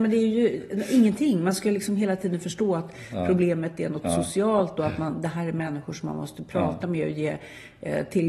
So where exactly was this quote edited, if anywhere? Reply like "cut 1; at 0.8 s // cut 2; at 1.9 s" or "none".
none